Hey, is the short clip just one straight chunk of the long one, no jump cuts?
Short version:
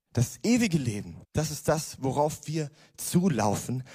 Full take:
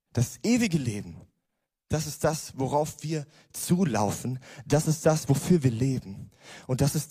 no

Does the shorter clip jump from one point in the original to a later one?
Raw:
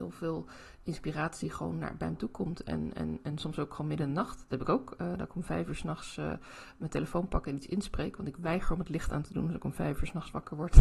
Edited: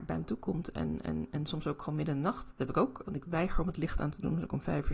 yes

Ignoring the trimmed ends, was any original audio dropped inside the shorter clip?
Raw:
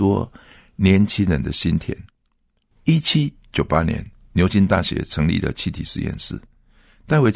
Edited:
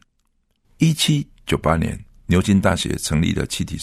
no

